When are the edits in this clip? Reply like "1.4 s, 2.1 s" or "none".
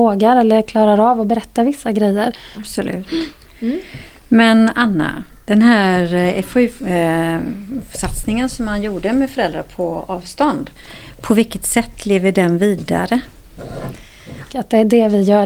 2.5 s, 14.5 s